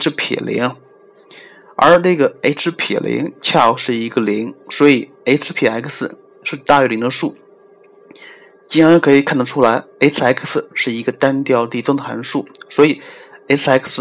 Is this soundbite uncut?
yes; 0 cuts

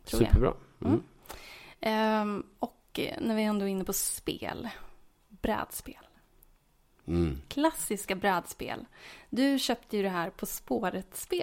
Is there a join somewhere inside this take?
no; 0 cuts

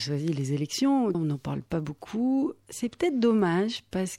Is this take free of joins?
no; 1 cut; at 1.1 s

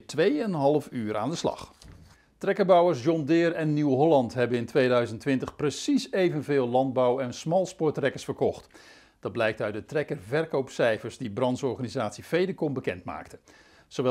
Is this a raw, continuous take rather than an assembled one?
yes; 0 cuts

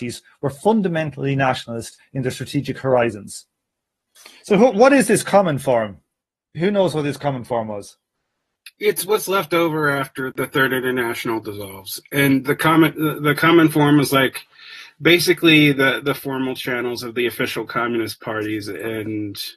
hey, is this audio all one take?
no; 1 cut; at 10.3 s

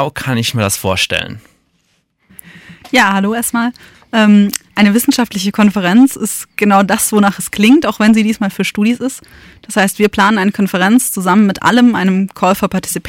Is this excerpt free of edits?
yes; 0 cuts

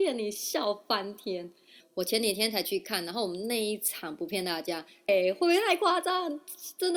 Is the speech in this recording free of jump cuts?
no; 2 cuts; at 1.8 s, 5.1 s

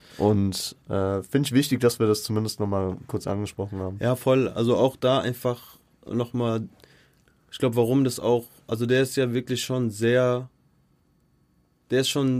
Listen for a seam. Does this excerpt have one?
no; 0 cuts

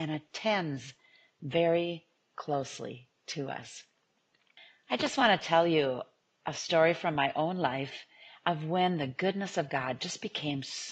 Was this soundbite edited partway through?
no; 0 cuts

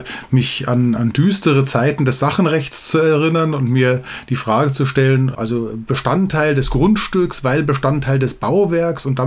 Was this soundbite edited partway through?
yes; 1 cut; at 5.4 s

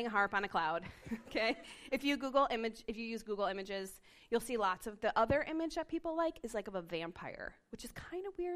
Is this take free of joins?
yes; 0 cuts

